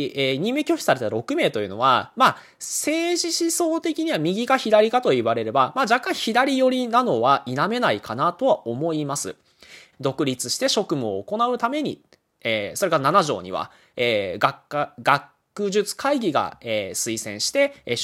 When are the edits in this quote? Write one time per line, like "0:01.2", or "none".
0:09.9